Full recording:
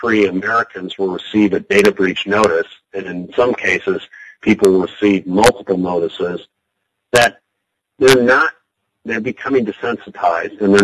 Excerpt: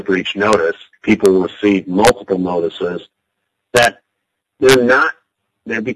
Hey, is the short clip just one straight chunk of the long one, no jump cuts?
no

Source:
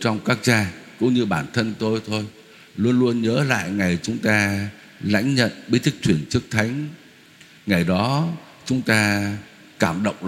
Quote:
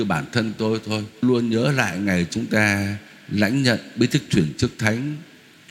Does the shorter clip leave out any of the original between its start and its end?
yes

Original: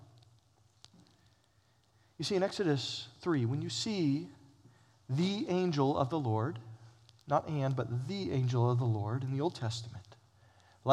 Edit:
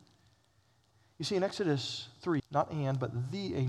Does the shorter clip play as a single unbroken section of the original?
no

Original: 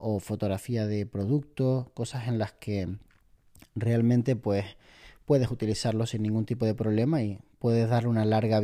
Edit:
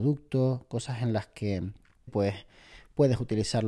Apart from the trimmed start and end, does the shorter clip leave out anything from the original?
yes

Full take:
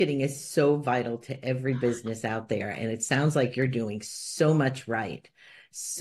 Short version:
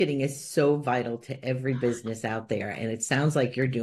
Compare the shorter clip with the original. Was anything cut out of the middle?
no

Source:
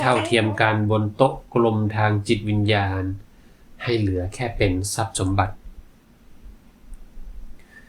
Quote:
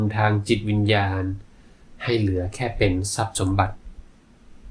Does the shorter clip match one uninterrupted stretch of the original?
yes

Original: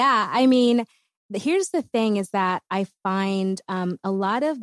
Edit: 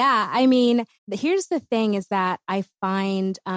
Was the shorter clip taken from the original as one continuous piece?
no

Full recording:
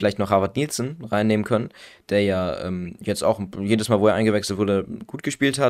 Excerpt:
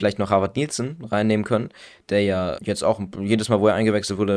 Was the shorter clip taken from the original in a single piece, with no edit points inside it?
no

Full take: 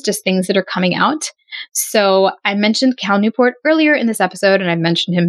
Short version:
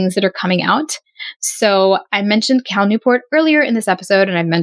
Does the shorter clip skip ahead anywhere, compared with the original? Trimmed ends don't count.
no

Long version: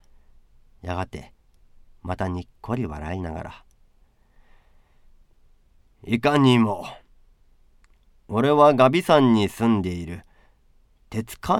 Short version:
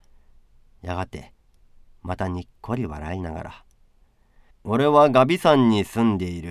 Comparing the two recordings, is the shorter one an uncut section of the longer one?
no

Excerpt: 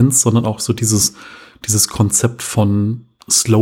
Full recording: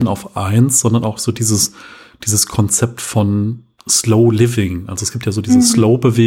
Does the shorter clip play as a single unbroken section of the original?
yes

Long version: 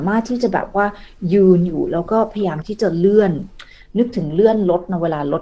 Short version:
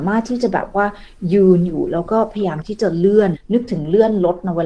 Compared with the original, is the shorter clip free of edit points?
no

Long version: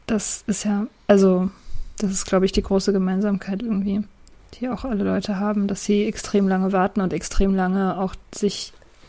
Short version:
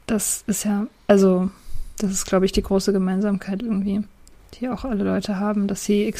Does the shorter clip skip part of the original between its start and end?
no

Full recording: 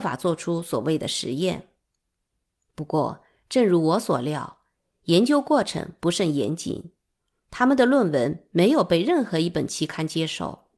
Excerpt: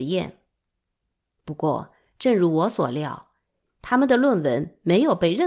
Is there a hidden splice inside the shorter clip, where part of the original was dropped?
yes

